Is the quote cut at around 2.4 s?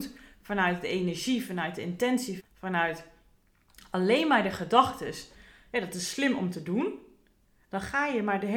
yes; 1 cut; at 2.4 s

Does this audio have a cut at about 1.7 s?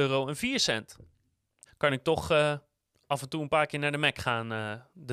yes; 1 cut; at 1.7 s

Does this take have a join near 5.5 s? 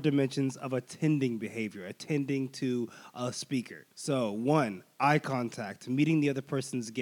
no; 1 cut; at 3.9 s

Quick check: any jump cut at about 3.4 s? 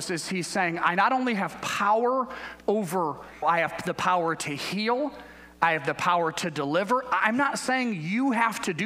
yes; 1 cut; at 3.4 s

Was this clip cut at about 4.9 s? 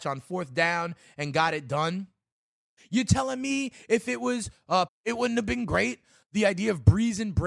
yes; 2 cuts; at 2.8 s, 4.9 s

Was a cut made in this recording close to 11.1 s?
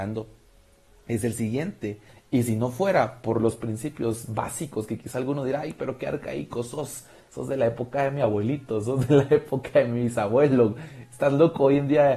no; 1 cut; at 2.1 s

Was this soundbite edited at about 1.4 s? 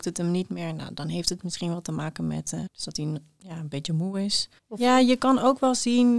no; 2 cuts; at 2.7 s, 4.6 s

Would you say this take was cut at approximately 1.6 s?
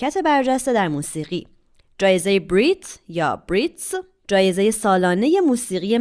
no; 0 cuts

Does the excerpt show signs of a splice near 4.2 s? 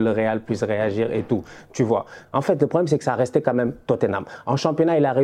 no; 1 cut; at 2.2 s

